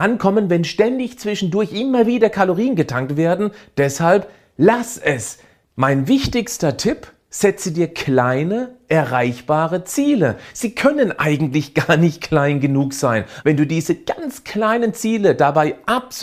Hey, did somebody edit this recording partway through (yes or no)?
yes